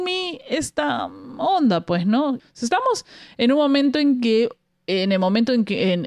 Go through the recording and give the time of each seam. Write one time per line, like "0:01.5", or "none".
0:02.4